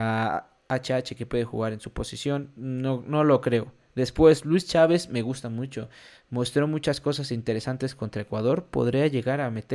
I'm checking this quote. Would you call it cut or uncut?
uncut